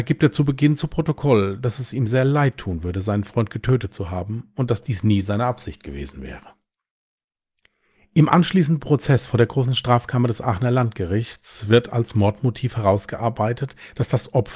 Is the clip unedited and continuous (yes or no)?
yes